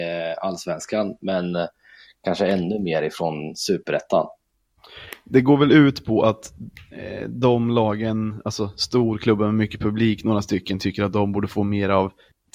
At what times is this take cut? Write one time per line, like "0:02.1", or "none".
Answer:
none